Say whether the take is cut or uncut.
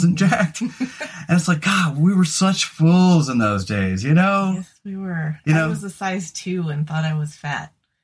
uncut